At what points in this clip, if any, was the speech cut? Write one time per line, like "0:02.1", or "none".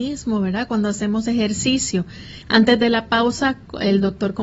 0:02.4